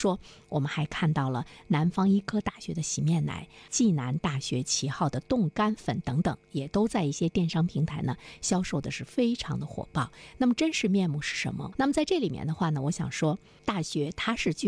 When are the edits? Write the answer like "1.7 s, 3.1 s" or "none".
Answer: 11.7 s